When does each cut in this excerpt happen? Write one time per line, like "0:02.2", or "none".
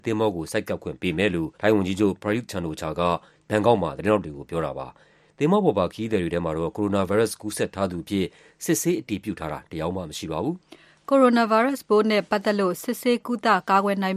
0:01.5